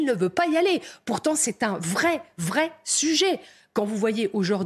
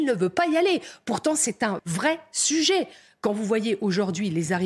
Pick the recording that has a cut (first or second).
second